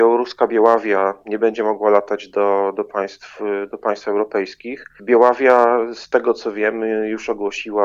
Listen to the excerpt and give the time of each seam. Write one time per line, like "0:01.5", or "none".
0:05.0